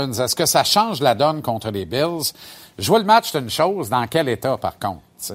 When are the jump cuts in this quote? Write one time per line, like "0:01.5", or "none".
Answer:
none